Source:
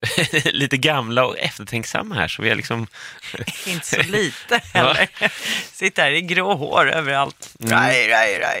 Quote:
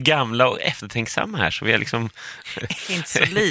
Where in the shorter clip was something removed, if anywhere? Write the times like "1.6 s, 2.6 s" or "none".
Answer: none

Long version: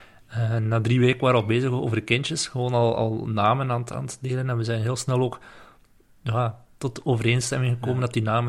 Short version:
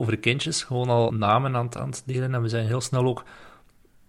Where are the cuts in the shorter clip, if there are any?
1.1 s

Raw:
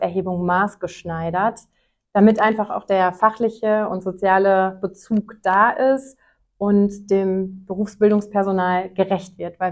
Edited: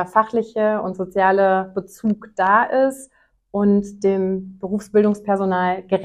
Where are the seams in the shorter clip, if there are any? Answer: none

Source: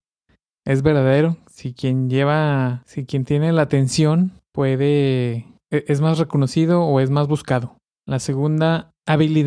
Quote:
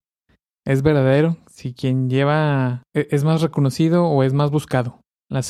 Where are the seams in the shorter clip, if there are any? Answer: 2.8 s

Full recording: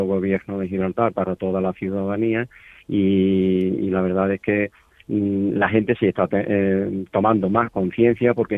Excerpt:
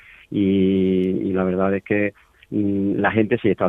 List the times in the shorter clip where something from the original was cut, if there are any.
none

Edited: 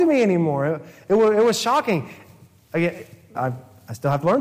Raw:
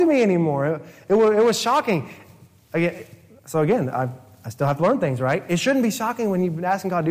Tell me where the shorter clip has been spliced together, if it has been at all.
3.3 s

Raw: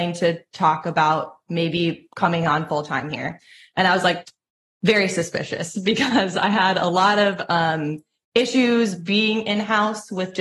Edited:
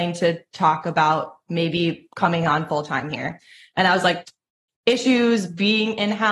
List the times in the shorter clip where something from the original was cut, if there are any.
4.7 s

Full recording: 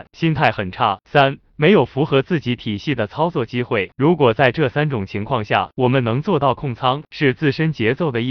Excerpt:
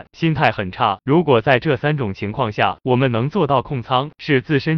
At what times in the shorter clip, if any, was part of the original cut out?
1.0 s

